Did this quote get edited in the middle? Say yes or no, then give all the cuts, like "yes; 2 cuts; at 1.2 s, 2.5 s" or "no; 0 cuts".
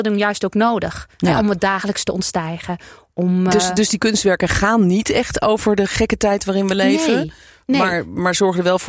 no; 0 cuts